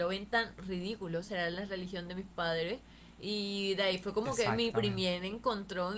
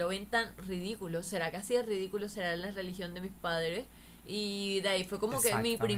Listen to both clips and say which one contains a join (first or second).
first